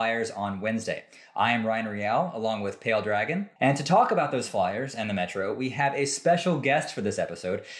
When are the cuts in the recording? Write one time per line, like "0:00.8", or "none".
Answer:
0:03.6